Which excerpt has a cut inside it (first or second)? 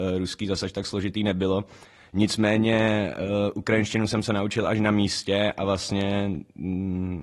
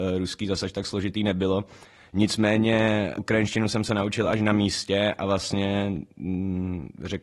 second